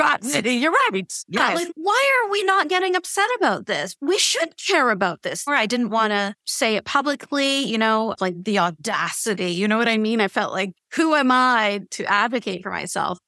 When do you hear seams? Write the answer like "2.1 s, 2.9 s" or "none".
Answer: 5.5 s, 8.2 s